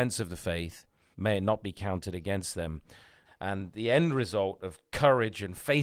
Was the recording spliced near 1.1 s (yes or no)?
yes